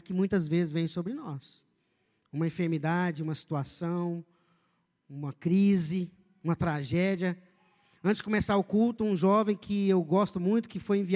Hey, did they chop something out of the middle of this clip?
no; 0 cuts

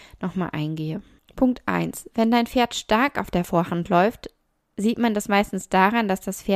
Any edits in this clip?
yes; 1 cut; at 1.2 s

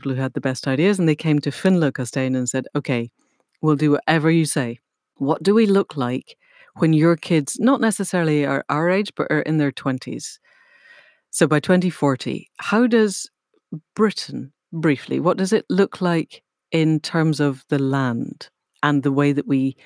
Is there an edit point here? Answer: no; 0 cuts

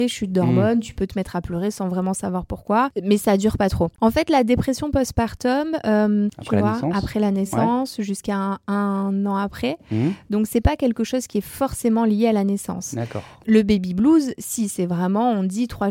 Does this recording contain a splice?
yes; 2 cuts; at 3.9 s, 6.3 s

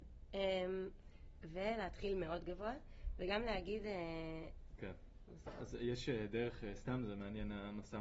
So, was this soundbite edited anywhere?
yes; 2 cuts; at 1.4 s, 4.8 s

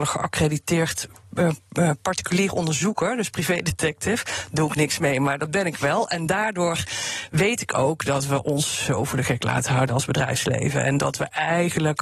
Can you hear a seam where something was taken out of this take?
no; 0 cuts

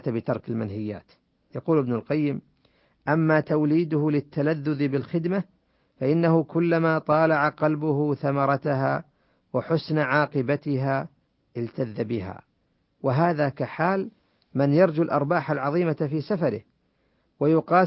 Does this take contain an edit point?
no; 0 cuts

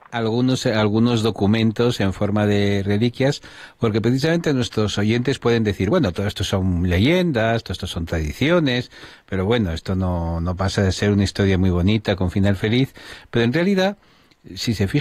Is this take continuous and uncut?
yes; 0 cuts

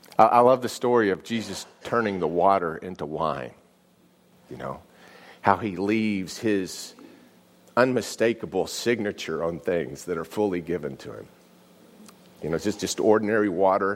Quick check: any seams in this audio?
no; 0 cuts

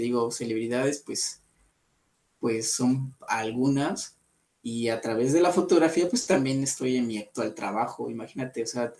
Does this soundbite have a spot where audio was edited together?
no; 0 cuts

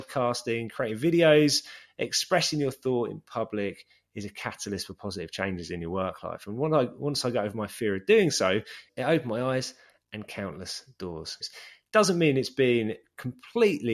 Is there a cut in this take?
no; 0 cuts

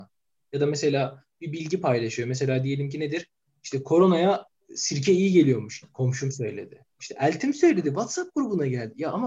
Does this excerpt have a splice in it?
yes; 1 cut; at 5.8 s

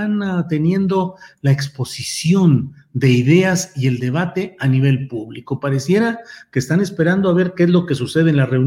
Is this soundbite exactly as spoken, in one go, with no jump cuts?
yes; 0 cuts

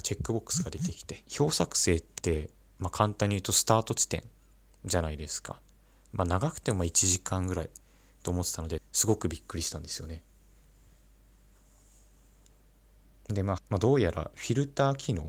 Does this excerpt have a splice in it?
yes; 3 cuts; at 1.3 s, 8.8 s, 13.6 s

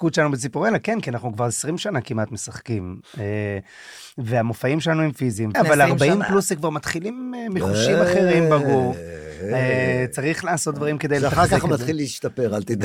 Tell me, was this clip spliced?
yes; 1 cut; at 5.5 s

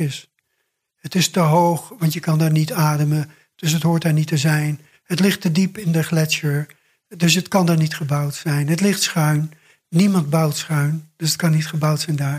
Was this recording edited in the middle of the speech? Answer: no; 0 cuts

